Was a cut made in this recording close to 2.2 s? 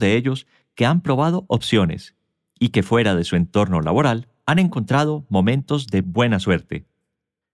no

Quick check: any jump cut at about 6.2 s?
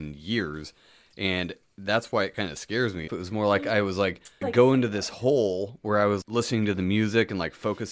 yes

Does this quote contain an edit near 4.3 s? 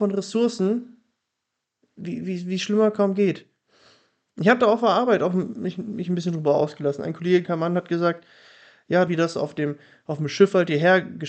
no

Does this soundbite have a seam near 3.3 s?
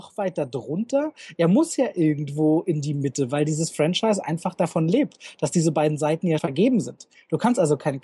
no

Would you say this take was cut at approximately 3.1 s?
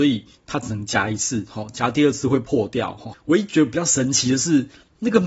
yes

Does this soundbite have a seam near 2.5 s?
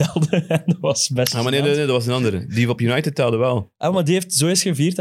no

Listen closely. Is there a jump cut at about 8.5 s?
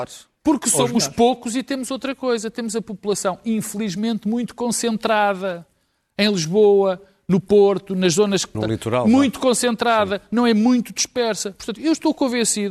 yes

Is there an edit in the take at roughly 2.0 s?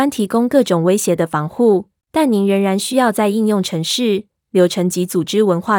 yes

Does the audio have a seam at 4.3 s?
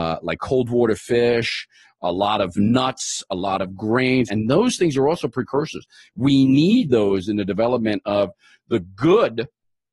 yes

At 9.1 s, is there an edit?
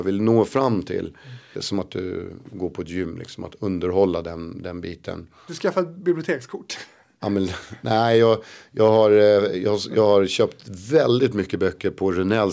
no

